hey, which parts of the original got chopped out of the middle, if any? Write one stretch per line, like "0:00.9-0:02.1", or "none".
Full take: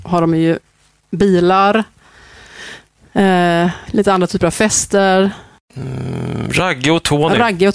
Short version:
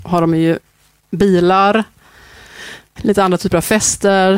0:03.0-0:03.9